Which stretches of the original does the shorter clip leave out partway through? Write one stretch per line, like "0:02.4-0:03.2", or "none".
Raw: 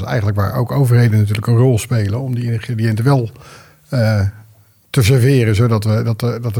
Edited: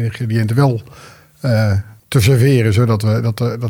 0:04.5-0:04.8